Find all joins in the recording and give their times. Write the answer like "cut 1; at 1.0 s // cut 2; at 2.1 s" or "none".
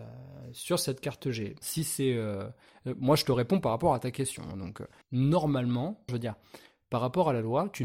cut 1; at 1.6 s // cut 2; at 5.0 s // cut 3; at 6.1 s